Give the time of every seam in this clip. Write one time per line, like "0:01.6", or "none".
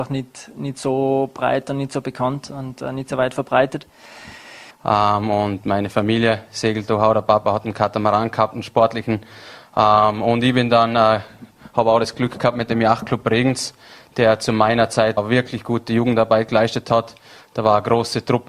0:04.7
0:15.2

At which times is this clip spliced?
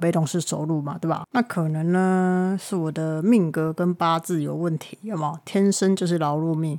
0:01.2

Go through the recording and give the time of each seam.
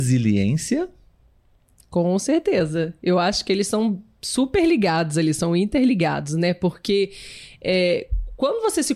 none

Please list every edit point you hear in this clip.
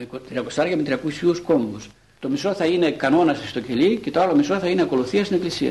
0:02.2

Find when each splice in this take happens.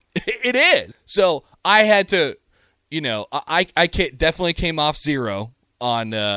0:00.9

